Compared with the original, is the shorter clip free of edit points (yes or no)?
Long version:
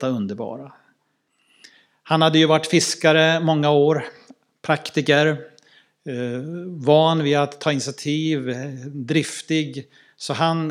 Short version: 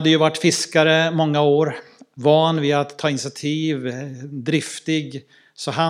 no